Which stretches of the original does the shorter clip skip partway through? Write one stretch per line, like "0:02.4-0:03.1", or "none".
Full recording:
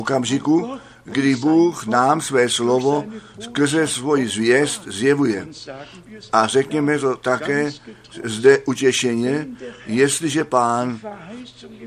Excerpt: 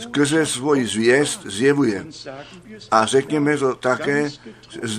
none